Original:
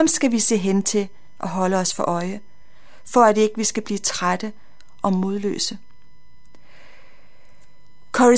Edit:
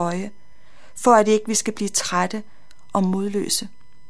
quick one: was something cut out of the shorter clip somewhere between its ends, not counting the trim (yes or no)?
no